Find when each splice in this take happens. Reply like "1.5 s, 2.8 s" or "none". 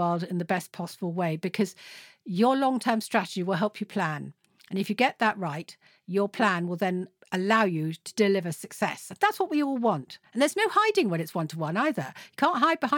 none